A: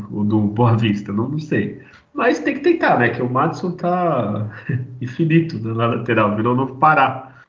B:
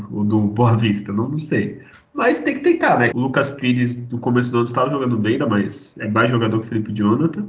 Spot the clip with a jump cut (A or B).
B